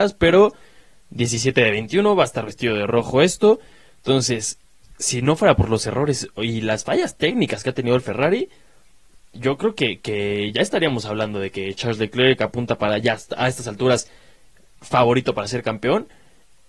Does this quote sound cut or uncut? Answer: uncut